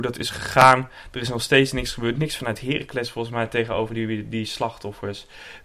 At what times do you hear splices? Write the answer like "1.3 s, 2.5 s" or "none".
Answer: none